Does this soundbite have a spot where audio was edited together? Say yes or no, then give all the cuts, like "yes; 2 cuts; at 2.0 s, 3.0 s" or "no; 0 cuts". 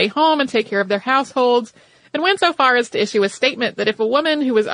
no; 0 cuts